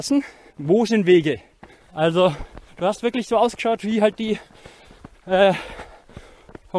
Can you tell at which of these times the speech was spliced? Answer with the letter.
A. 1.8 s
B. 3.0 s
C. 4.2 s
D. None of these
A